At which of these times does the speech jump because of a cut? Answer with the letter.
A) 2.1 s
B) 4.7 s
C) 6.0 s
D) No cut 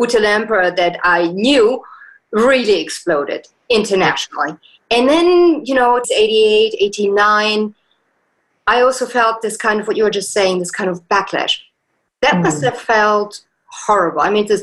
C